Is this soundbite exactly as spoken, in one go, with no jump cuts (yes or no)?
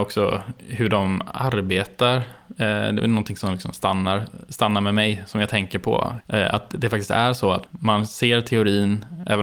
no